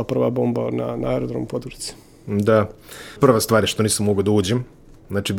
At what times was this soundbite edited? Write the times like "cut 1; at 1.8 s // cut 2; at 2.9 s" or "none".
cut 1; at 3.2 s